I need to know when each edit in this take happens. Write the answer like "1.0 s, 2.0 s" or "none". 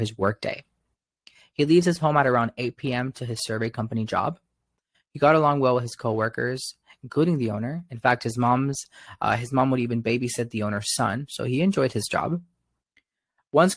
none